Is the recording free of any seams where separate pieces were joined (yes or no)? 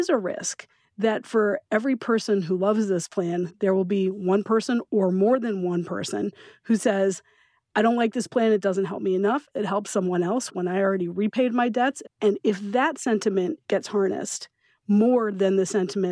no